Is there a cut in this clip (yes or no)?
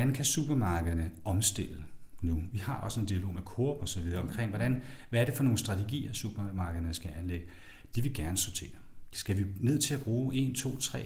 yes